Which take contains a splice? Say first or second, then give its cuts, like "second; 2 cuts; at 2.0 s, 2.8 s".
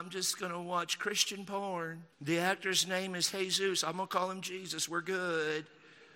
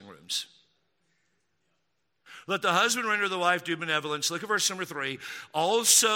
first; 1 cut; at 2.1 s